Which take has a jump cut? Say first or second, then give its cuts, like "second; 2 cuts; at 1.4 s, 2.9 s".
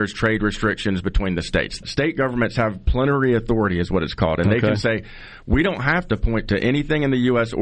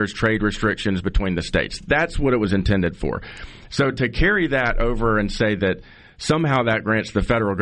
first; 1 cut; at 1.8 s